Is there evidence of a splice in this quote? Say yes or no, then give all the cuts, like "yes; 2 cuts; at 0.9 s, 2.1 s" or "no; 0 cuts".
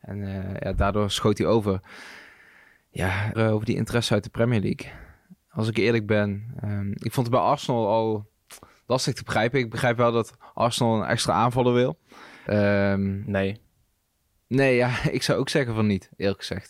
yes; 2 cuts; at 3.3 s, 12.5 s